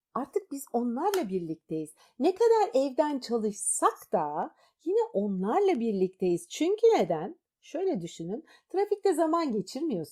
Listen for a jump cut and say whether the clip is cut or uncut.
uncut